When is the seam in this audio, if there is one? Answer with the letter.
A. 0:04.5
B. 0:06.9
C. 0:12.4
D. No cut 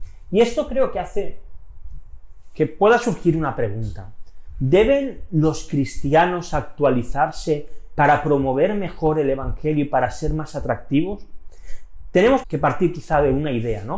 C